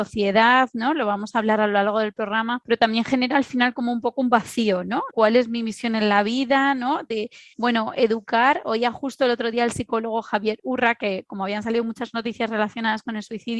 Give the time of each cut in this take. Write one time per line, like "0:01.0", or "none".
0:05.1